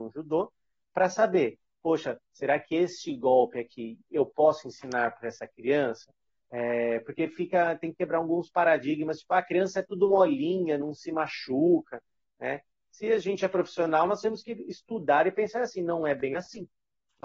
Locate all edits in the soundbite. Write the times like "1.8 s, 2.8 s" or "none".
6.3 s